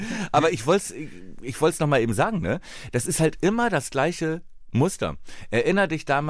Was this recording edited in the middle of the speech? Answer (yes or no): no